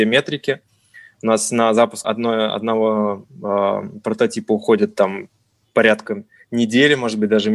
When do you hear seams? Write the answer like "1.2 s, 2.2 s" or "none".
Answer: 2.0 s